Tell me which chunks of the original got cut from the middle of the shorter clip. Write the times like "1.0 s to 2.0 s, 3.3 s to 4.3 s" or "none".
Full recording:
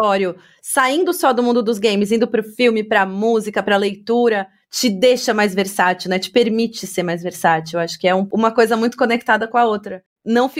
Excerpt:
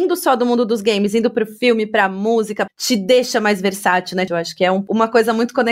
3.6 s to 4.6 s, 6.2 s to 7.7 s